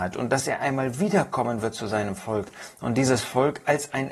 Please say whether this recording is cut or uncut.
uncut